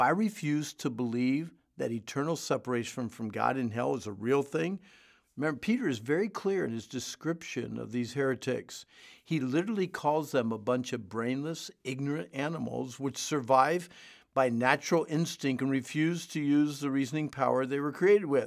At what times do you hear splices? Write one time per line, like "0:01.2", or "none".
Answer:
0:05.2